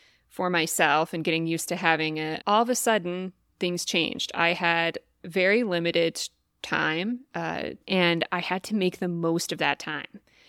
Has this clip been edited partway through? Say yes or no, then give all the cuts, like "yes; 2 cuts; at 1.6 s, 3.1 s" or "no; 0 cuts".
yes; 2 cuts; at 2.4 s, 7.8 s